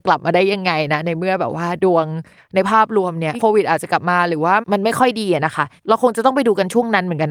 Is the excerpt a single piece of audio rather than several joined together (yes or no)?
no